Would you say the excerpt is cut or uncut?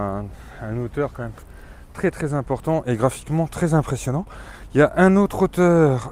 uncut